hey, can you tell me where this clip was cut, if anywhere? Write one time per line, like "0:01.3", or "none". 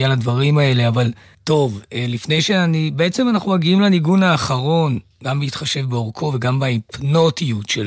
0:01.3